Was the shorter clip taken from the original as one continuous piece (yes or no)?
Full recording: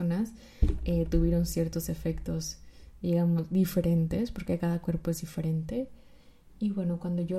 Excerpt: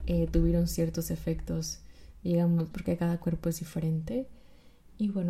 no